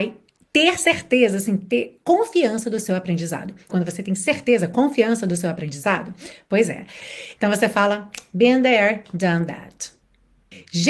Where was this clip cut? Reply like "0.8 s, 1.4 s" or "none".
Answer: 3.7 s, 7.4 s